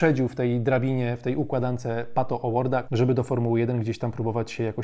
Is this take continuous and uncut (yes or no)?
no